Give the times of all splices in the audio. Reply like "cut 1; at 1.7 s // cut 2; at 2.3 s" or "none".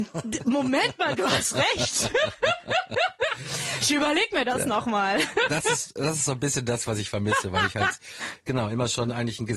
none